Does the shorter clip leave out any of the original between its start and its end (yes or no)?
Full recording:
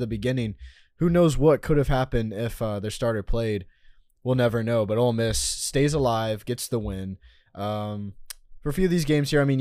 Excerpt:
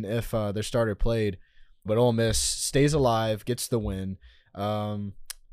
yes